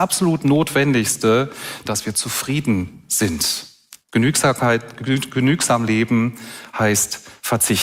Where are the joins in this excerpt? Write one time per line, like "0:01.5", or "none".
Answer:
0:01.8
0:04.0